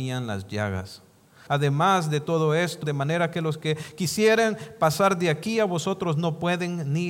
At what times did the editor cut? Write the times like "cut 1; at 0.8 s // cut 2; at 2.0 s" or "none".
cut 1; at 1.5 s // cut 2; at 2.8 s

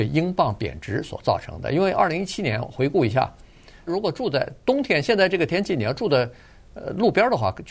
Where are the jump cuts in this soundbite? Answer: cut 1; at 3.9 s

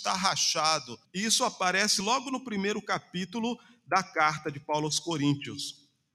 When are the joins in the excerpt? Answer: cut 1; at 1.0 s

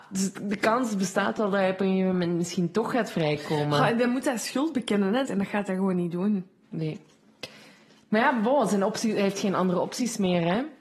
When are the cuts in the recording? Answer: cut 1; at 5.2 s // cut 2; at 6.6 s

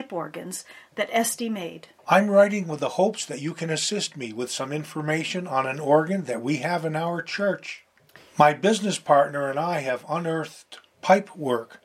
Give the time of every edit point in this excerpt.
cut 1; at 2.0 s // cut 2; at 8.2 s

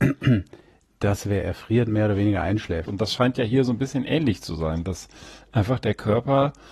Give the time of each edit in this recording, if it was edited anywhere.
cut 1; at 2.9 s

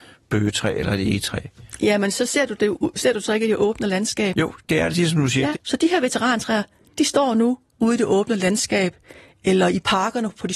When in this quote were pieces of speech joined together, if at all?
cut 1; at 5.5 s

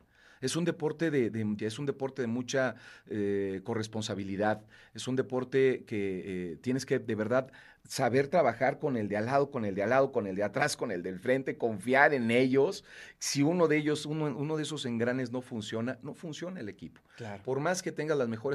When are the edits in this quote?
cut 1; at 1.6 s

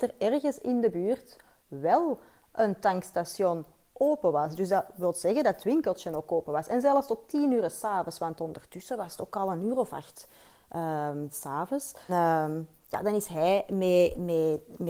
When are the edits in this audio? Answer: cut 1; at 12.1 s

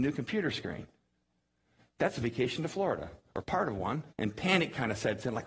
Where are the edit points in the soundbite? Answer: cut 1; at 4.1 s

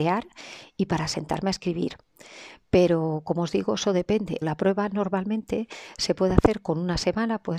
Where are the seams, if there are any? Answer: cut 1; at 4.4 s

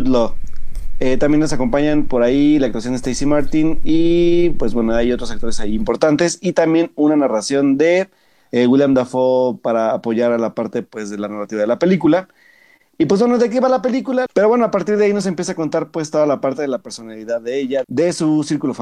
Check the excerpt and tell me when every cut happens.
cut 1; at 14.3 s // cut 2; at 17.8 s

